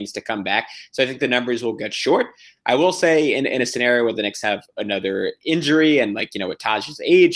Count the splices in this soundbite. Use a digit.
0